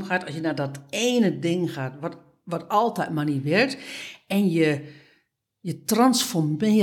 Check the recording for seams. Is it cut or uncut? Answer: uncut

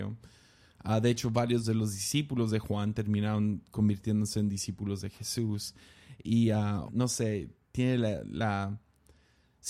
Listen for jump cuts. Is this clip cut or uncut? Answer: cut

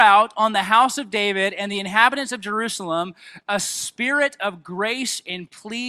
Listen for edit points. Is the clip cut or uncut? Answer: uncut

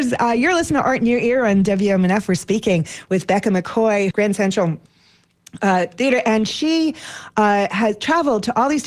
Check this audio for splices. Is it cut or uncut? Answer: cut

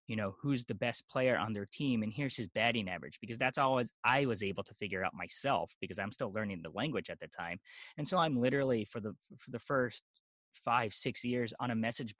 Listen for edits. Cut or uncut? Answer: uncut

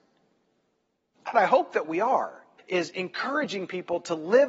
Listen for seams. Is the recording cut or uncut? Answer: cut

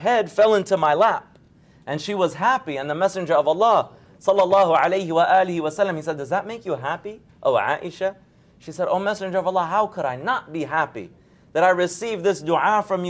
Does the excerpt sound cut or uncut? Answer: uncut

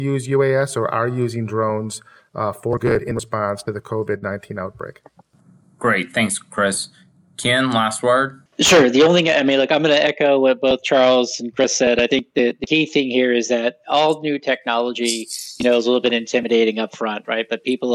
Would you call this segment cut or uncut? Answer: uncut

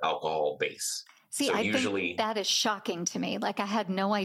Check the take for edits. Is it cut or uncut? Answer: uncut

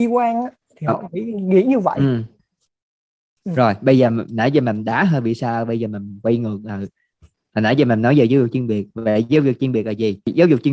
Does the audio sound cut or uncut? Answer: uncut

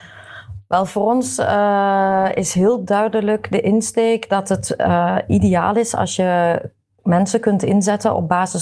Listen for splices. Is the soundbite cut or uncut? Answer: uncut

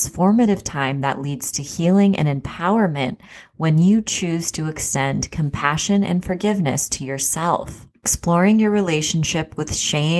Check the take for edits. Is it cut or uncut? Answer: uncut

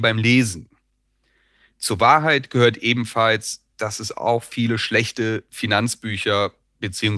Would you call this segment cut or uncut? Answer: uncut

